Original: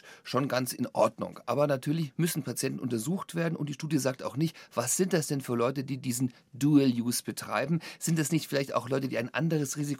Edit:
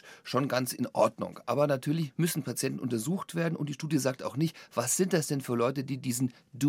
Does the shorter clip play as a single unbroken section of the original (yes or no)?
yes